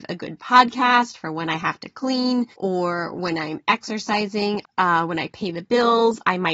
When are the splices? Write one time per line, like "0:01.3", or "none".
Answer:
0:02.5
0:04.6